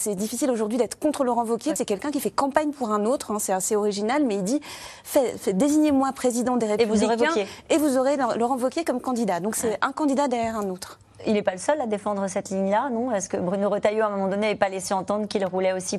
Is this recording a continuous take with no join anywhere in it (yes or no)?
no